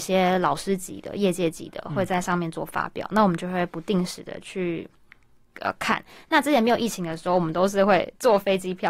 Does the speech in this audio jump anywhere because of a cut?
no; 0 cuts

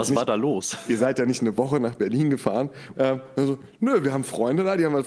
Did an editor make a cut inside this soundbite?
yes; 1 cut; at 2.9 s

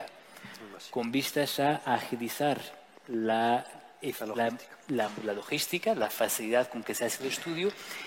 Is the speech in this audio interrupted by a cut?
no; 0 cuts

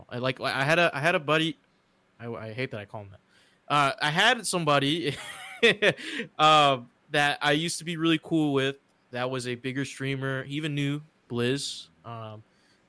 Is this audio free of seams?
yes; 0 cuts

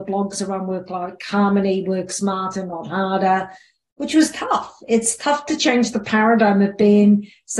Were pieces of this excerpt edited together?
no; 0 cuts

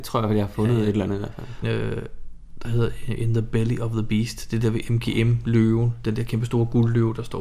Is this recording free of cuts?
no; 1 cut; at 1.6 s

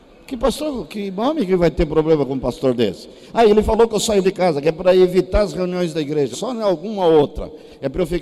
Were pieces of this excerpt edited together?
yes; 2 cuts; at 4.2 s, 6.3 s

